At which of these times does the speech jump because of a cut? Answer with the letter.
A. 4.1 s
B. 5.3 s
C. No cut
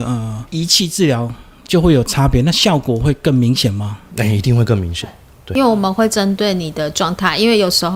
C